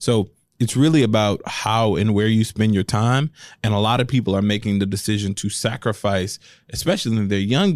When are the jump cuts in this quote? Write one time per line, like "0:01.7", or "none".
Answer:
none